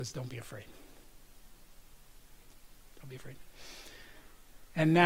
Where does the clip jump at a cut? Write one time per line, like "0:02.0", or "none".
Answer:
0:02.9